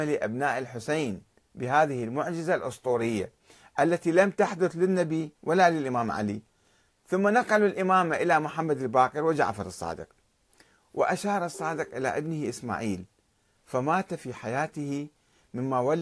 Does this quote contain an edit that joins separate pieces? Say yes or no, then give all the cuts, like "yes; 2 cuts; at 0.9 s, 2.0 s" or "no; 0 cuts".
no; 0 cuts